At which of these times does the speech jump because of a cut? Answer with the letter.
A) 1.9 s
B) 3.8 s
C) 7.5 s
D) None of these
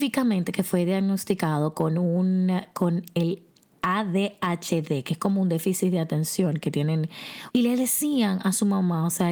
C